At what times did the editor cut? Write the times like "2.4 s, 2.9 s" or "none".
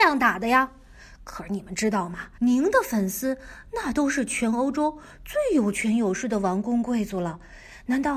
2.4 s